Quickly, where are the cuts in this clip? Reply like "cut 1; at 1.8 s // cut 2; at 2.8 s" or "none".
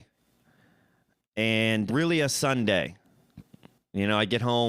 cut 1; at 1.9 s